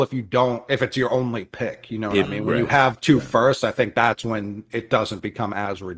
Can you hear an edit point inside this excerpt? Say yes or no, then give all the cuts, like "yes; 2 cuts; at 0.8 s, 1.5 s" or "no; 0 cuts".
no; 0 cuts